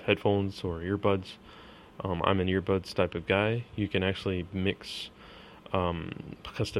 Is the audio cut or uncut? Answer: uncut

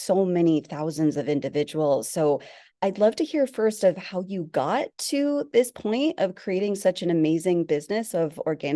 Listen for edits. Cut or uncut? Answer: uncut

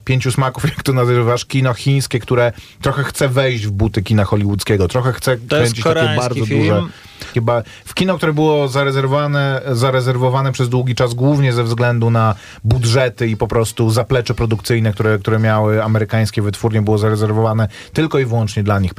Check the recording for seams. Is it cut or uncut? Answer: cut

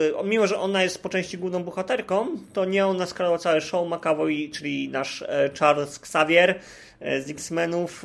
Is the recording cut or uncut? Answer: uncut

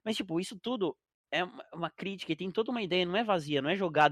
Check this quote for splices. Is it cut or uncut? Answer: uncut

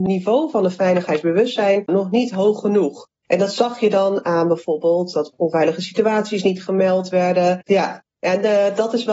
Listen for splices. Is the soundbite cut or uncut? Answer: cut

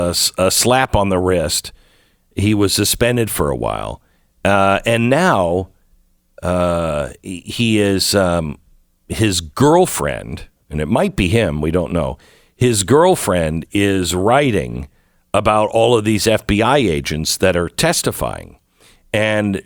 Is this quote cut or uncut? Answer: uncut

